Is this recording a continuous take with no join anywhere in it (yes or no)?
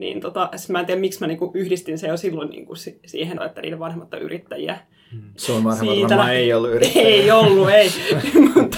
no